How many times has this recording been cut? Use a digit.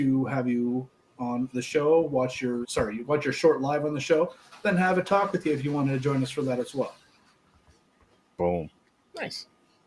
1